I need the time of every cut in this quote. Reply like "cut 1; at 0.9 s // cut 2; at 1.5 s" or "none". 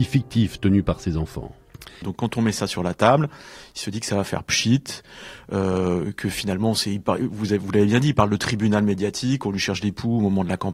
cut 1; at 2.0 s